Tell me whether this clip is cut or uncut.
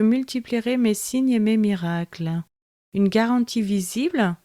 uncut